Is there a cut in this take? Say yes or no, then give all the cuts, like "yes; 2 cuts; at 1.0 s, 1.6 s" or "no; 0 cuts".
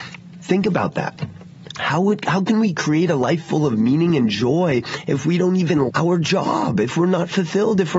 yes; 2 cuts; at 1.7 s, 5.9 s